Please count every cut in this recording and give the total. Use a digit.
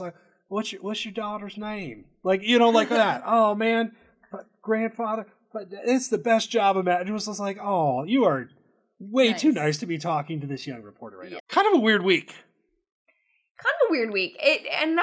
1